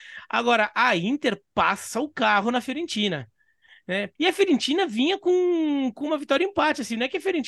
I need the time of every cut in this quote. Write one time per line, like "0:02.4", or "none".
0:04.2